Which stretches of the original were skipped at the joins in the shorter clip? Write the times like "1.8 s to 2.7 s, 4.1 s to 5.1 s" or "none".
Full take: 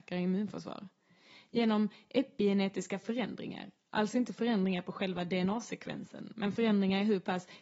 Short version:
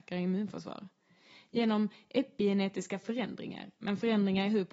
3.8 s to 6.3 s